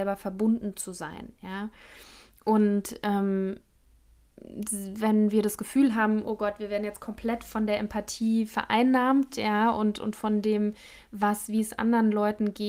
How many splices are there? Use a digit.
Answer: 0